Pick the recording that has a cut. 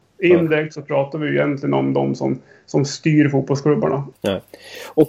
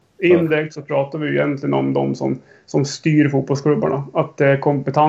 first; 1 cut; at 4.1 s

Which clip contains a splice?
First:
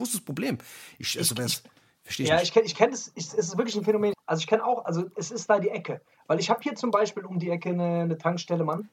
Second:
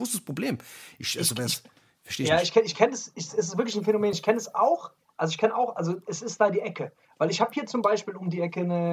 first; 1 cut; at 4.1 s

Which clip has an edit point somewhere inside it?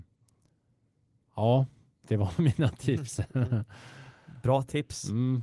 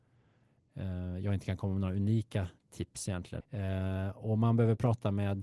second; 1 cut; at 3.4 s

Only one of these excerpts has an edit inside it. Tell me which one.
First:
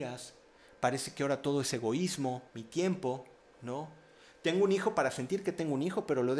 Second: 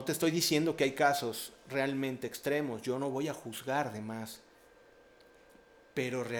first; 1 cut; at 2.5 s

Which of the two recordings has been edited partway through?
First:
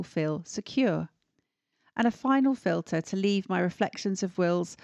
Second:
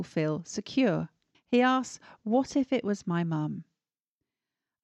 second; 1 cut; at 1.3 s

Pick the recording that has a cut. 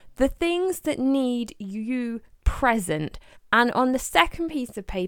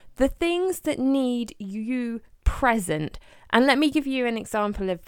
first; 1 cut; at 3.4 s

